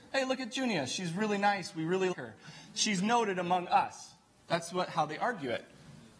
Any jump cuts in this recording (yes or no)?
yes